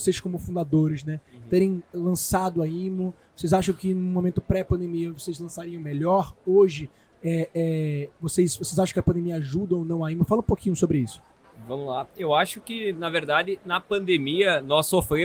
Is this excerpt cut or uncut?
uncut